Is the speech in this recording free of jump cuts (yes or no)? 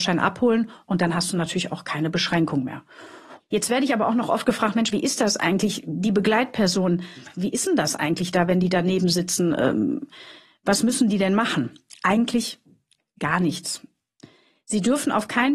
no